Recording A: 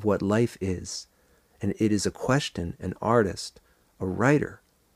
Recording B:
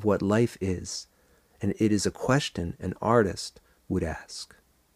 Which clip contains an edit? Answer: B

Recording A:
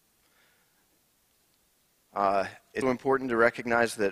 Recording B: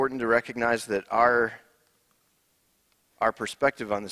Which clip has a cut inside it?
A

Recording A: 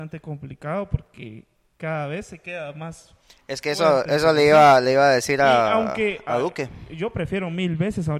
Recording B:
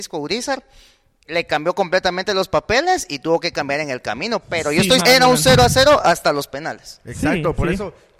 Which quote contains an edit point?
B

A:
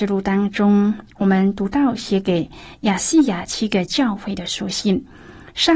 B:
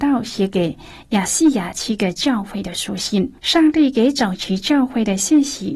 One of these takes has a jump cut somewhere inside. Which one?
B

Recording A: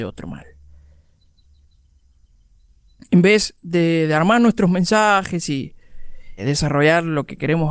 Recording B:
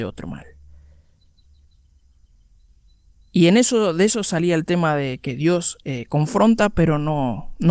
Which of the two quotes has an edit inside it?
A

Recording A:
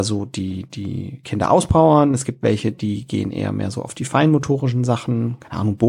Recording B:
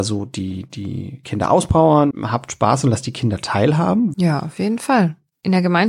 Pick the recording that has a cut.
B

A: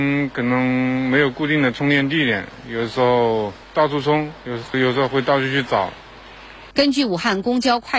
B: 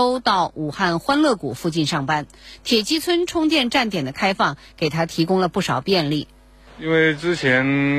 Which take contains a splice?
A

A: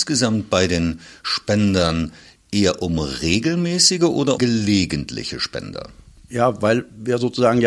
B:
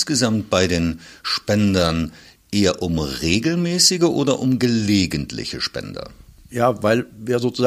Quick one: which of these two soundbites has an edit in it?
A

